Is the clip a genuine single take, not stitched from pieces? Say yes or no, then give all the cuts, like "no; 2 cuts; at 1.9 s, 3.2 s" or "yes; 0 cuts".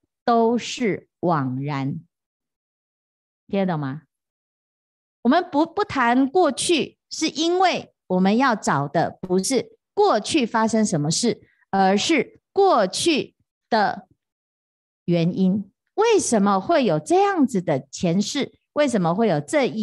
yes; 0 cuts